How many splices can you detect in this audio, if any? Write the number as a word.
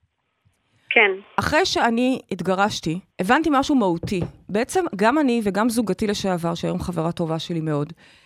one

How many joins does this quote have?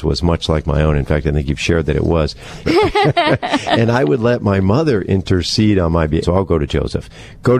two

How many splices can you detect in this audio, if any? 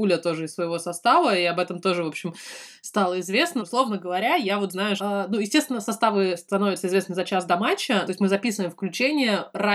three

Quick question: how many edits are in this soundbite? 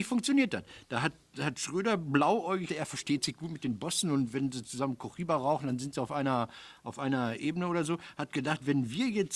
one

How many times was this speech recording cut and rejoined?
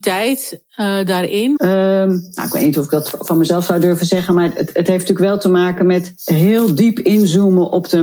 one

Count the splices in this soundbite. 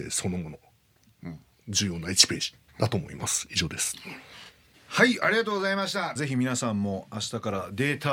two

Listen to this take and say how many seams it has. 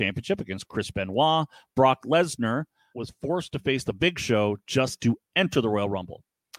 one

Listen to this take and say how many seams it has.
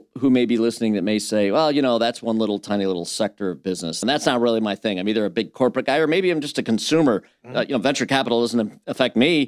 one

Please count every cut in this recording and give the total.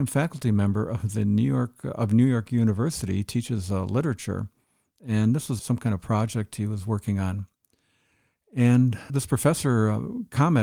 two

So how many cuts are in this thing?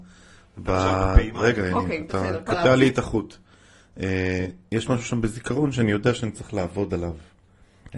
zero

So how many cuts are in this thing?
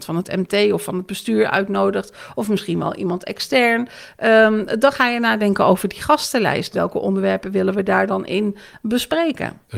one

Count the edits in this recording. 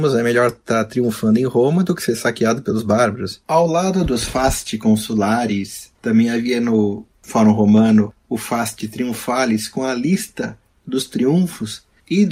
one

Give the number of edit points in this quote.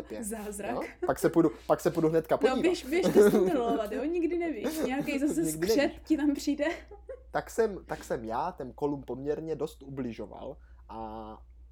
zero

